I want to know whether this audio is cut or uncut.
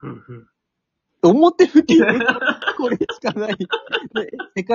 cut